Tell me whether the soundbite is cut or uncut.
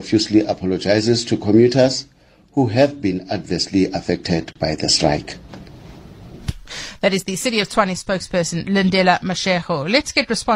uncut